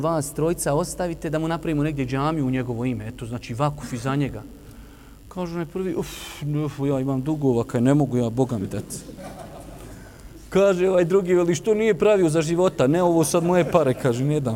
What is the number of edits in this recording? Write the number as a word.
zero